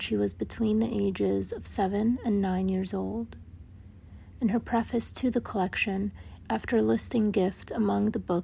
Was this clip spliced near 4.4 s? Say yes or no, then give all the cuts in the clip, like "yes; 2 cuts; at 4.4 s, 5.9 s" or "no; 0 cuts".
no; 1 cut; at 6.4 s